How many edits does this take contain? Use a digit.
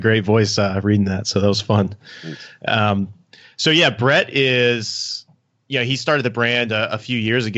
0